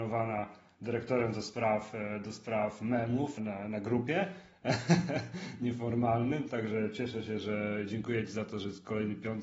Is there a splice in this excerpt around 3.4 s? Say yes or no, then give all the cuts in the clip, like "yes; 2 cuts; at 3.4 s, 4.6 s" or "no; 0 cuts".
yes; 1 cut; at 3.4 s